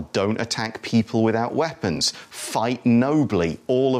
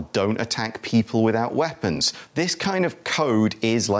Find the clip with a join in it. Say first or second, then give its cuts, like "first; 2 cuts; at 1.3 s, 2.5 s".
second; 1 cut; at 2.3 s